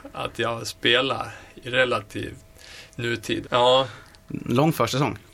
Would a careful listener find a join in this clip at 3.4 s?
yes; 1 cut; at 3.4 s

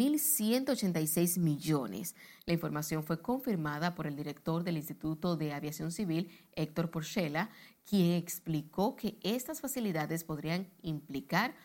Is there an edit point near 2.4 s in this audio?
yes; 1 cut; at 2.4 s

